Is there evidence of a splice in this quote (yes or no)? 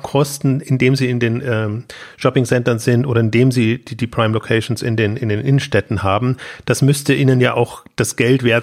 no